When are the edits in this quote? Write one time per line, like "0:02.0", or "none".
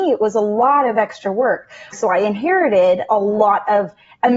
0:01.9